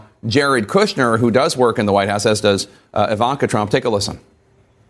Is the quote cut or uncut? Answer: uncut